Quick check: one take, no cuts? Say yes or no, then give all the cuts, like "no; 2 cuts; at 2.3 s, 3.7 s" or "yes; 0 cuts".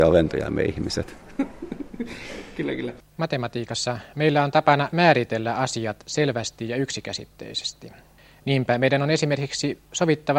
yes; 0 cuts